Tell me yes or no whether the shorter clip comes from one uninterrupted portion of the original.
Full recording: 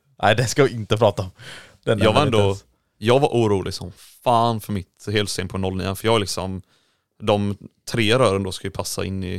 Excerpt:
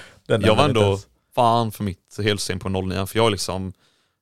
no